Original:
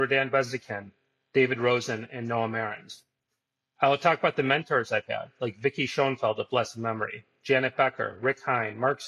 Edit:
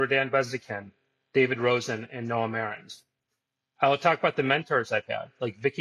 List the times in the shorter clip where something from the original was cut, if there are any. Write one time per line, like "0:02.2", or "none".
none